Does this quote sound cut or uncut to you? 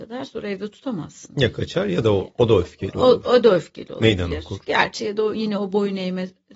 cut